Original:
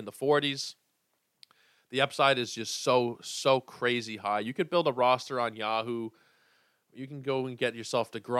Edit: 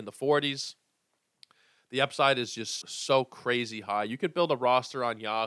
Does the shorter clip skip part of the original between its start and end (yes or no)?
yes